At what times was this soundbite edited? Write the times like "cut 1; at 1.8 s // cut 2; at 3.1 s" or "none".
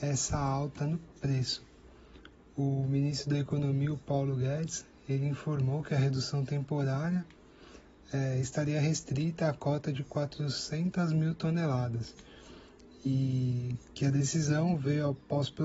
none